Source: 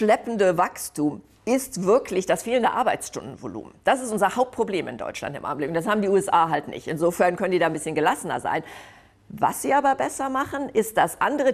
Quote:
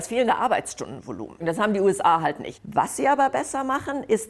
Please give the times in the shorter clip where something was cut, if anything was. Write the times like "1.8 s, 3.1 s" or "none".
1.4 s, 2.5 s